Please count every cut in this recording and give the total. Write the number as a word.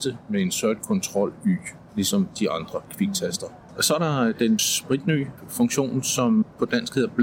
one